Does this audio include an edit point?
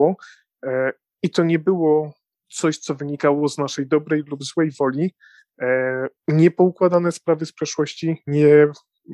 yes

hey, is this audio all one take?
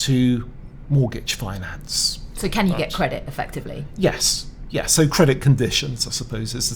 yes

